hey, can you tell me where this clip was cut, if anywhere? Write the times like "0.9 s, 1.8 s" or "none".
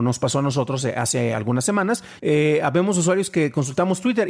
2.2 s